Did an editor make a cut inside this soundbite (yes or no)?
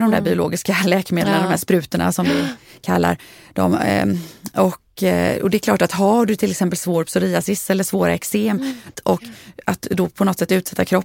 yes